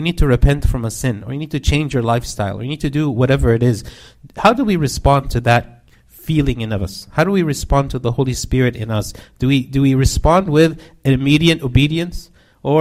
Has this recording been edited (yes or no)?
no